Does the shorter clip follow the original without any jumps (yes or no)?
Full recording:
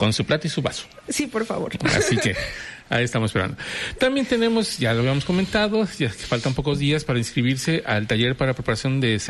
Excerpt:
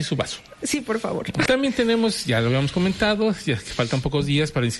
no